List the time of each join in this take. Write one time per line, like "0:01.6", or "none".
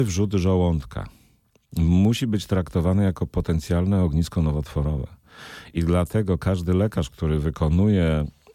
none